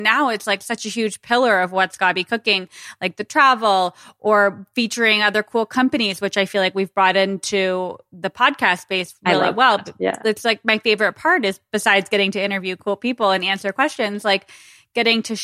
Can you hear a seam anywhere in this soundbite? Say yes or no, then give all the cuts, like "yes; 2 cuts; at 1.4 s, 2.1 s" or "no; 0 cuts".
no; 0 cuts